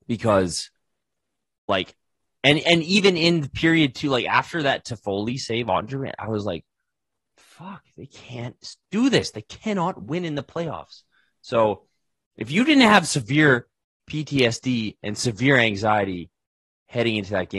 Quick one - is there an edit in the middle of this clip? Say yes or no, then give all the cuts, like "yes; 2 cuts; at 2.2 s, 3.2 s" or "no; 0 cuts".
no; 0 cuts